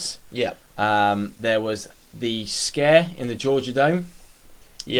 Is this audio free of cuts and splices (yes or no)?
yes